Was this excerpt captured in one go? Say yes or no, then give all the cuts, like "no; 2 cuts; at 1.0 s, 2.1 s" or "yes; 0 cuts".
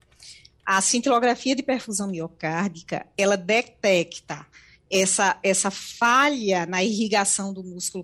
yes; 0 cuts